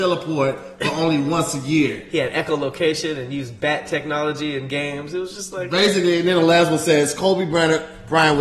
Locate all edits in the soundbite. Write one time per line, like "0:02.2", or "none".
none

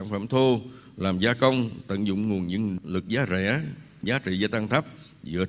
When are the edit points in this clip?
none

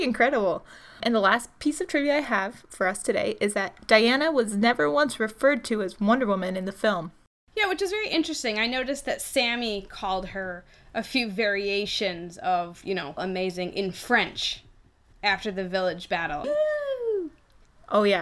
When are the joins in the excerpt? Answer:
0:13.2
0:16.4

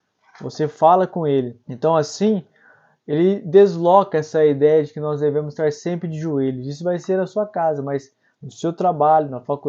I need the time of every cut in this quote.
0:01.6

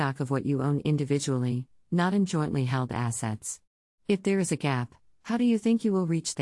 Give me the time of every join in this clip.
0:03.9

